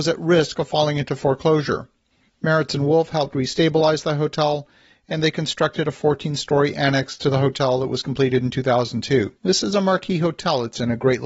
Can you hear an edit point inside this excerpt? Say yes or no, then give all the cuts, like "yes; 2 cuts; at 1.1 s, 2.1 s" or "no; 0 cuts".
yes; 1 cut; at 9.4 s